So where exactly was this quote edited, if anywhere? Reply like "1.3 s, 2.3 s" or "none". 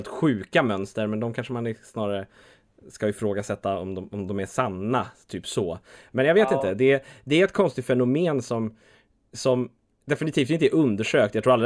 none